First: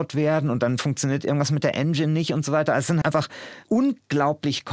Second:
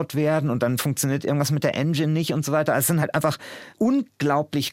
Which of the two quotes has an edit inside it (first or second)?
first